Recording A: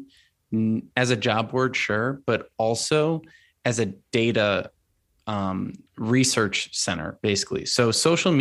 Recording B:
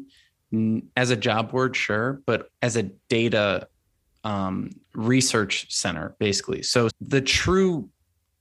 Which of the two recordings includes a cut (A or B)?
B